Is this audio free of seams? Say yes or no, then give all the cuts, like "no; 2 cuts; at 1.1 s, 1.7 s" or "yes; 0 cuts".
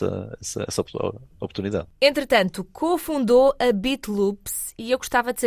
yes; 0 cuts